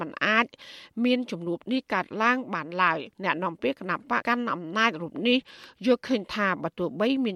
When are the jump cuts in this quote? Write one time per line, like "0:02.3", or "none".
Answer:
0:03.1
0:04.2